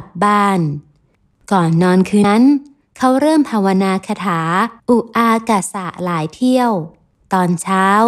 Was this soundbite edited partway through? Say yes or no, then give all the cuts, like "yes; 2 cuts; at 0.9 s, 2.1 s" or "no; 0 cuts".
yes; 2 cuts; at 2.2 s, 4.8 s